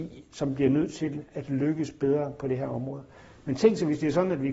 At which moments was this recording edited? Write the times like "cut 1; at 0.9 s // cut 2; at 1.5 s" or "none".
none